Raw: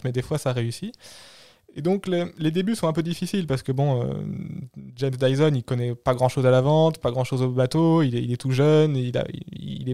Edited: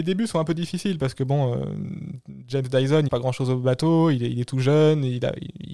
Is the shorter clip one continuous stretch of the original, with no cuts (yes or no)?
no